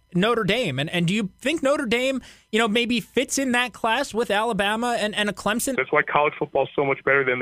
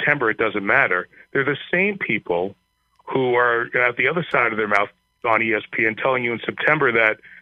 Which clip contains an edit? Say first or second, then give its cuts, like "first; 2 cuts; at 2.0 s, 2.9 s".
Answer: first; 1 cut; at 5.7 s